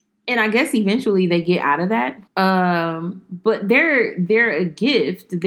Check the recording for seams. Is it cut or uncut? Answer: cut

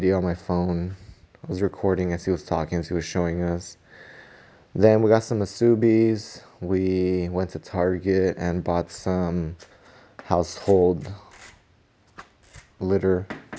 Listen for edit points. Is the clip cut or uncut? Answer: uncut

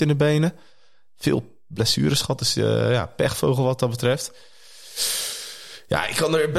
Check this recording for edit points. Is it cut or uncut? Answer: uncut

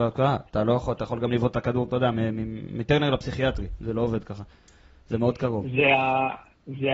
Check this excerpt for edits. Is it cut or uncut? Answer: uncut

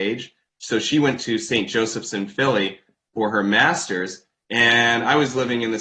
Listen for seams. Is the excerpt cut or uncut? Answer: uncut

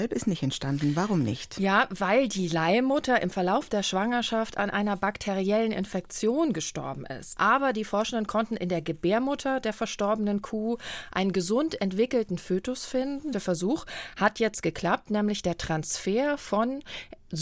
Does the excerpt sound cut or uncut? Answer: cut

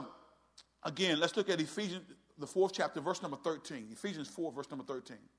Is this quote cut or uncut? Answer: uncut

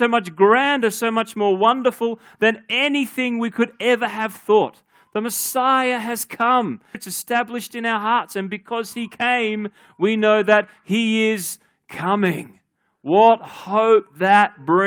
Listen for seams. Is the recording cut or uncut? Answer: cut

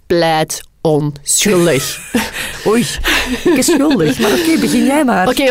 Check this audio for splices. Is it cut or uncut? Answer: uncut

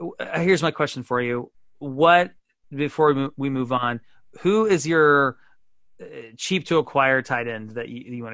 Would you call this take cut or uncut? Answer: uncut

